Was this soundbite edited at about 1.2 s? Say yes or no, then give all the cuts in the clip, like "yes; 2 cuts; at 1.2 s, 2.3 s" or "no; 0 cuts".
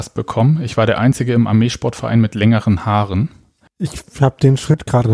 no; 1 cut; at 3.7 s